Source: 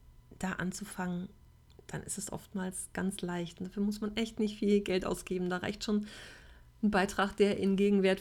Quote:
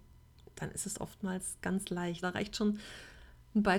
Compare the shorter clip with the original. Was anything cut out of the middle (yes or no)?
yes